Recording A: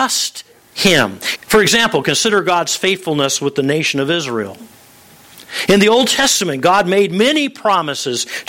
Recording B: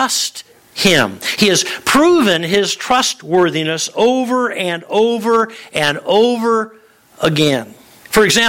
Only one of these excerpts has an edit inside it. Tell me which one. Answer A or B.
A